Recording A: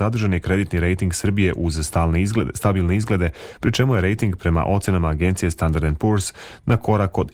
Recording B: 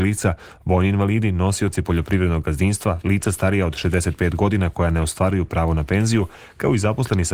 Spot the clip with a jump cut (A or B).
B